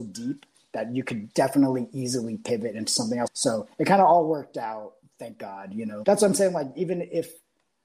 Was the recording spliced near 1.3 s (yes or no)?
no